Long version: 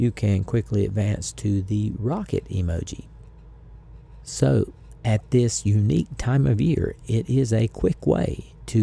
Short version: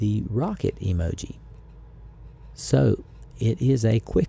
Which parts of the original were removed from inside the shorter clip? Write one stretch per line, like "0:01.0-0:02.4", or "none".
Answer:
0:05.0-0:07.0